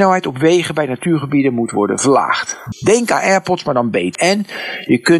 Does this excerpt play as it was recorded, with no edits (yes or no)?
no